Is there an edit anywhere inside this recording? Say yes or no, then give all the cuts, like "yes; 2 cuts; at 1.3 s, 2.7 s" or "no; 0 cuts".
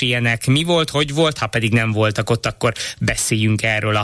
no; 0 cuts